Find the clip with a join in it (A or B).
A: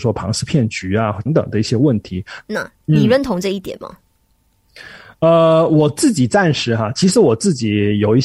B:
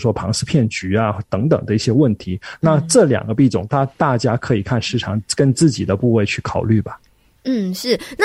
A